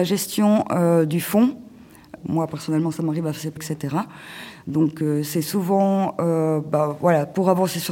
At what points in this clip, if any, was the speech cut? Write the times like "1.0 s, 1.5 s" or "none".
2.2 s, 3.6 s